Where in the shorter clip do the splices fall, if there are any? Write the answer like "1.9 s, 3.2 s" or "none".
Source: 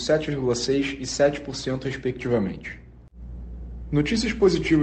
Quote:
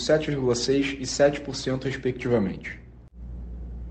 none